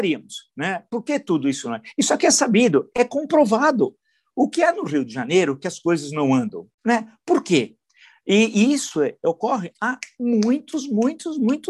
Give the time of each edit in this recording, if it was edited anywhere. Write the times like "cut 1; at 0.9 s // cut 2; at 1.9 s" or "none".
cut 1; at 6.7 s